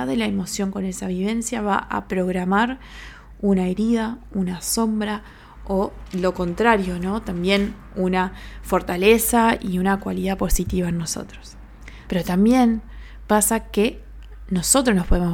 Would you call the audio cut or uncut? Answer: cut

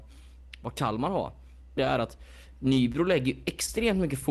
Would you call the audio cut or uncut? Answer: cut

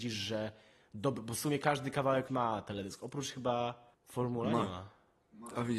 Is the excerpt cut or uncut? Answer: cut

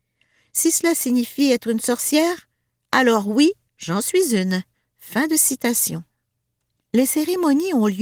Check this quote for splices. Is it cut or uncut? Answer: uncut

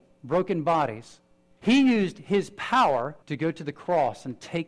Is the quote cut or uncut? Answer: cut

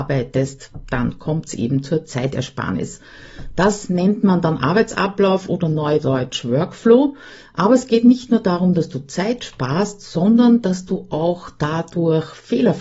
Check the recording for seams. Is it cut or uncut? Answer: uncut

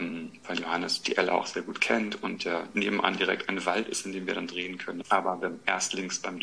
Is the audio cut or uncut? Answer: cut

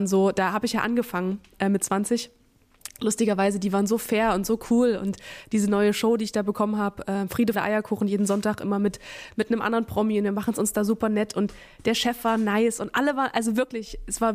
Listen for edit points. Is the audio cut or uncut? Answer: cut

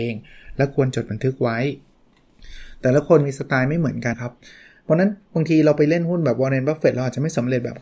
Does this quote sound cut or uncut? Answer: cut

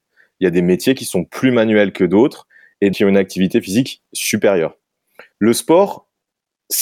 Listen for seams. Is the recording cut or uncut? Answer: cut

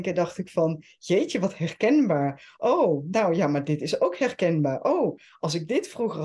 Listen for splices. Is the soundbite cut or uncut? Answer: uncut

